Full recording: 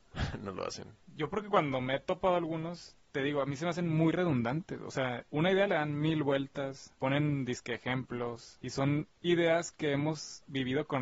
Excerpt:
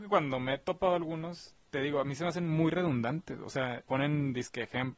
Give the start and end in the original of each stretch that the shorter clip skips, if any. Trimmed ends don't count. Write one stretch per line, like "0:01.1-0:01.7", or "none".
0:05.2-0:07.0